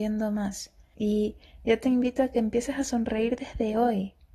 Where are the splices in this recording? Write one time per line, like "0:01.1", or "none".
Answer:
0:00.9